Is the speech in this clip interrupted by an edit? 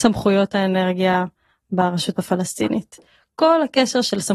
no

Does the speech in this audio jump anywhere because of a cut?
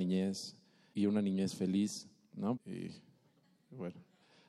yes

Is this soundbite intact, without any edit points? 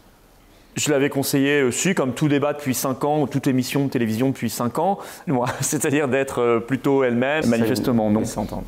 no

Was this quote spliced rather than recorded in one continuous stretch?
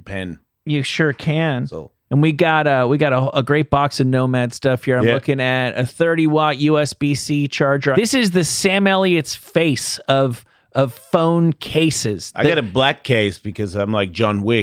yes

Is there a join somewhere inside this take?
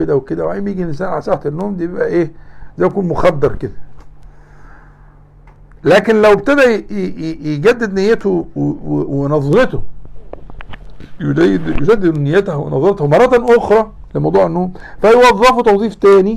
no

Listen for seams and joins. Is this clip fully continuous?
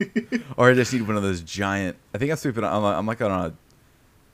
yes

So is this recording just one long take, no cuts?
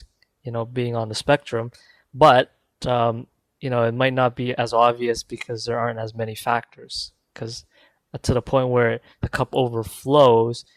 yes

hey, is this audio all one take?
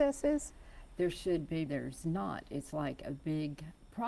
no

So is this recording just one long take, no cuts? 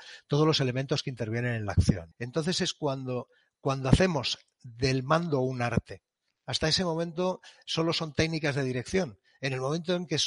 no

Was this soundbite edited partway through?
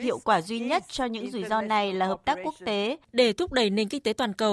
yes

